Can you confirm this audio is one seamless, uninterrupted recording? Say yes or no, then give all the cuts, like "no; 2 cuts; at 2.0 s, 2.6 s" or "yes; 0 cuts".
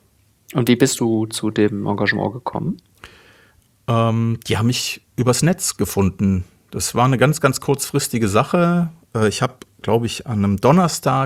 yes; 0 cuts